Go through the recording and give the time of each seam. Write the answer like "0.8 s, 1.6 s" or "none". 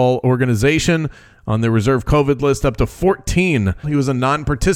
3.8 s